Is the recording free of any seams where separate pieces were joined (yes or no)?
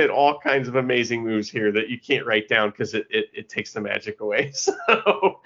yes